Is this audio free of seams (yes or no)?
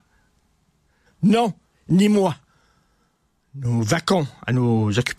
no